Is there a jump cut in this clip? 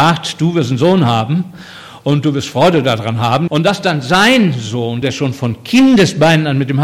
yes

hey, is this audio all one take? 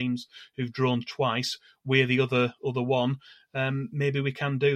yes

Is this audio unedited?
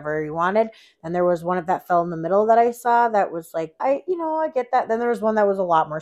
no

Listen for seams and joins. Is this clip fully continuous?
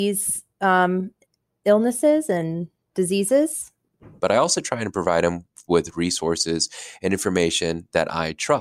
no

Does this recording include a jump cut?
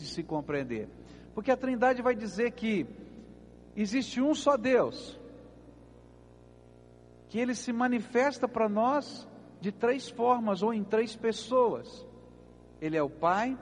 no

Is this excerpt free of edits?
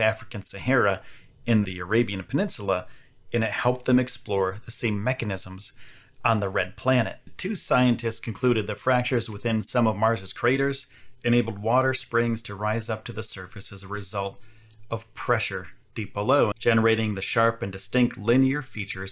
no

